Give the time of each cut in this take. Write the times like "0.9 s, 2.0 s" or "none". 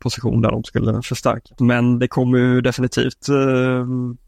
1.6 s